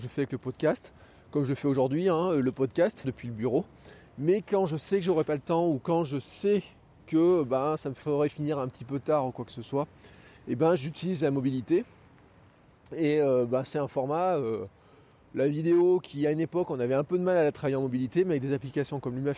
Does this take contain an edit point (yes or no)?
yes